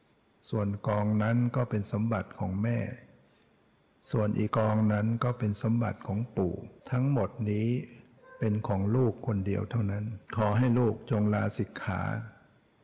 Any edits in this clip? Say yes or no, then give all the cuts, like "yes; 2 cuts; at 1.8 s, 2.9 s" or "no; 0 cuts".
yes; 3 cuts; at 4.5 s, 6.8 s, 10.2 s